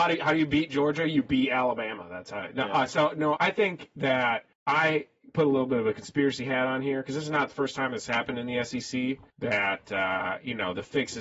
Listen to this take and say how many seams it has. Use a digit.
3